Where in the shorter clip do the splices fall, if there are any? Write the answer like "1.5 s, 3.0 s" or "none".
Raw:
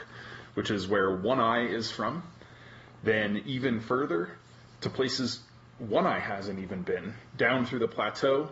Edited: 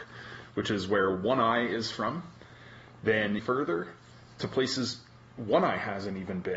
3.4 s